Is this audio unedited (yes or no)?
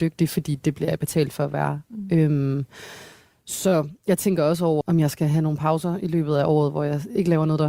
no